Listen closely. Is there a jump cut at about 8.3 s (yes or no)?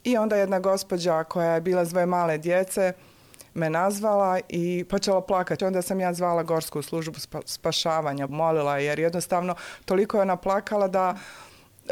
yes